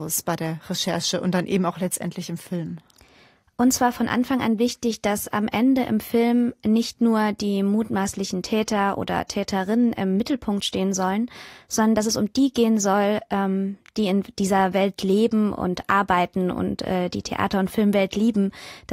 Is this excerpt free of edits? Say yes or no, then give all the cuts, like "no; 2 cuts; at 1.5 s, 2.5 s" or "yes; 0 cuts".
yes; 0 cuts